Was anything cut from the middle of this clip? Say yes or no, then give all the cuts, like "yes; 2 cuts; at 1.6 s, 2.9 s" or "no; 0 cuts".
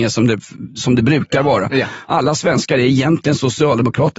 yes; 1 cut; at 2.1 s